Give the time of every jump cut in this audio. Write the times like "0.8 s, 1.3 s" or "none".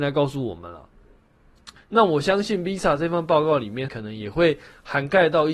1.8 s, 3.9 s